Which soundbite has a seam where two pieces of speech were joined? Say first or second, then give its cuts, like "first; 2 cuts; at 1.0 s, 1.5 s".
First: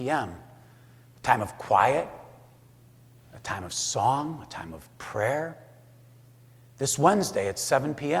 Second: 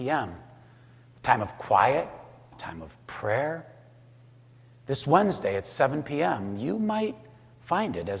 second; 1 cut; at 2.5 s